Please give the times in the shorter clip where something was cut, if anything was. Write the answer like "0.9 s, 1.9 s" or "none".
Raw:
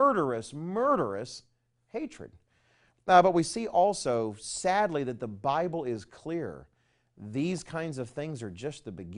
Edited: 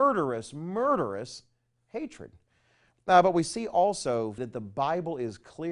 4.4 s